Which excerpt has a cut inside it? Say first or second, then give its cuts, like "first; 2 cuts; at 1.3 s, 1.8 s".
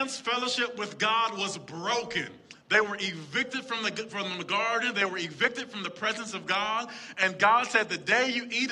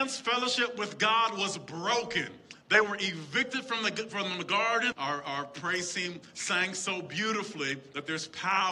second; 1 cut; at 4.9 s